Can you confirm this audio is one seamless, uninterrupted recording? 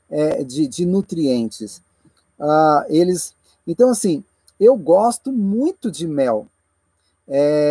yes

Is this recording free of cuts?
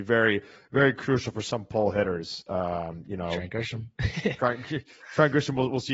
yes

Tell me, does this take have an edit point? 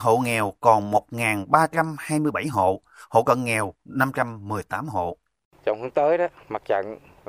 no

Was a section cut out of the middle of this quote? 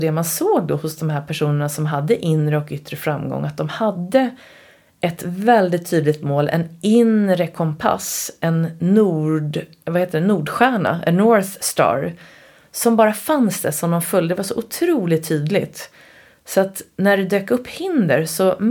no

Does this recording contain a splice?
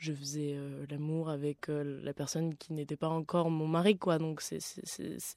no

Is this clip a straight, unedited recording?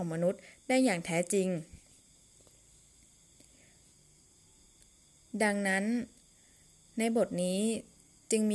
yes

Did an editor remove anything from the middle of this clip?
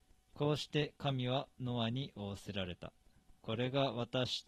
yes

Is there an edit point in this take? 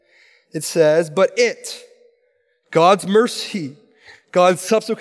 no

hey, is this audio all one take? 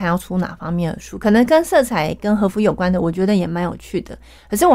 yes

